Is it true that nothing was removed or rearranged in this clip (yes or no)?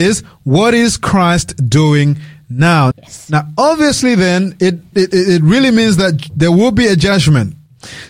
no